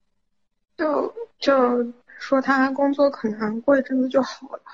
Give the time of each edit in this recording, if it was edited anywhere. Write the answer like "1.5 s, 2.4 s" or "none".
2.1 s